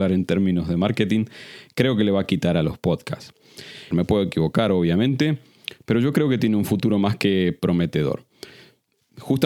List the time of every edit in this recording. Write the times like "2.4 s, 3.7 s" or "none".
3.9 s